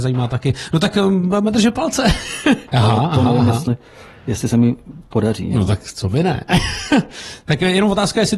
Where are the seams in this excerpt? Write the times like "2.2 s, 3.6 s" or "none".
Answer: 2.7 s